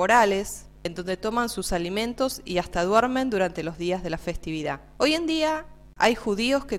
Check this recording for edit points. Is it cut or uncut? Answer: cut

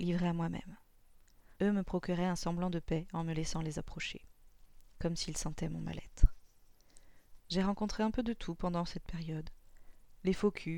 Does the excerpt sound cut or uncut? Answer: cut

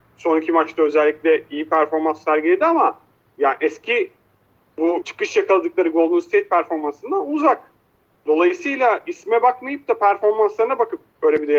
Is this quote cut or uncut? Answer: cut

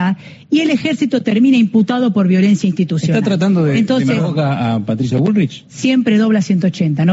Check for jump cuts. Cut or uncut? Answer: uncut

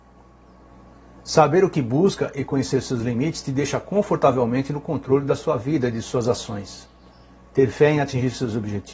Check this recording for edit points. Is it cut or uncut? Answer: uncut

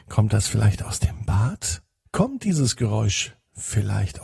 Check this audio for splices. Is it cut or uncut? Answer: cut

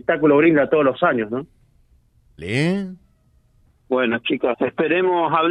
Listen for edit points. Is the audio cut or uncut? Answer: cut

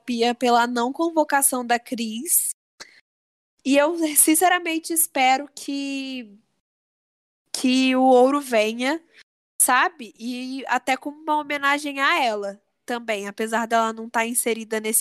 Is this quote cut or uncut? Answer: uncut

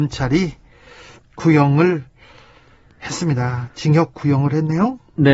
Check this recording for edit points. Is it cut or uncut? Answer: uncut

